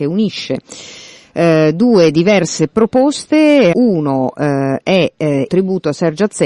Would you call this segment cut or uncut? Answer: cut